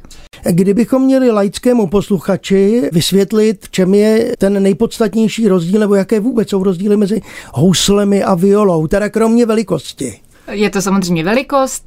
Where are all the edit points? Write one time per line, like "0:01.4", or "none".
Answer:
none